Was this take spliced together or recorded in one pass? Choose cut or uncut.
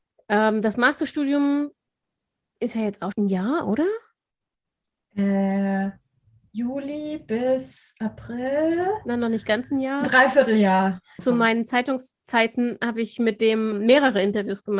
cut